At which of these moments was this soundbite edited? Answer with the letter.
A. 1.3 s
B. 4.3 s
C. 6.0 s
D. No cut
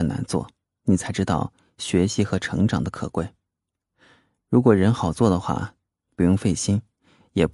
C